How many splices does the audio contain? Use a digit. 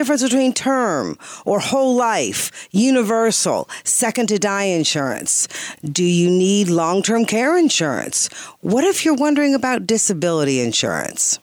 0